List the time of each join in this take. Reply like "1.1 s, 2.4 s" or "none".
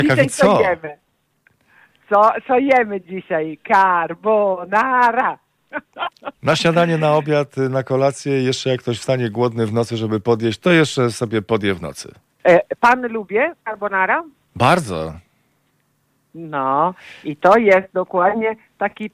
12.4 s